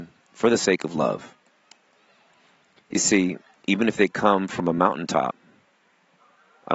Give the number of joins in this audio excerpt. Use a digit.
1